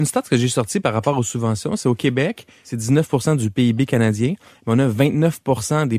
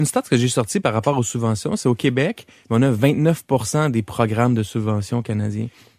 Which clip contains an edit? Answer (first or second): second